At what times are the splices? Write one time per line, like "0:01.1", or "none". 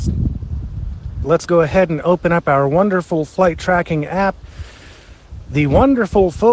0:01.2